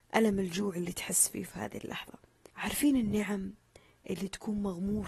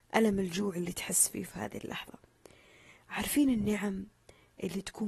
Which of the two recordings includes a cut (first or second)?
first